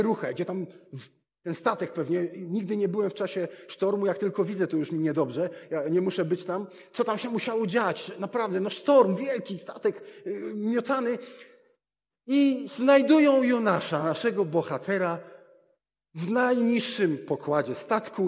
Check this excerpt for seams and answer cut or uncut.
uncut